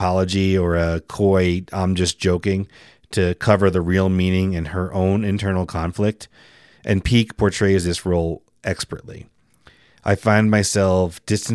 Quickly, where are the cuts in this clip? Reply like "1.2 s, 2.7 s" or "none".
none